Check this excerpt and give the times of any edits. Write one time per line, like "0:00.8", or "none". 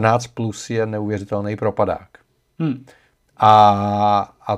0:03.2